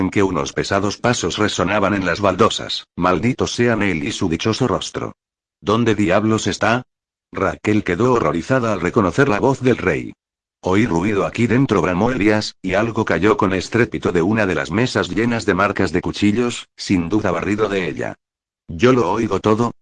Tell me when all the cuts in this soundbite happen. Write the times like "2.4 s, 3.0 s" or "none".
2.9 s, 18.5 s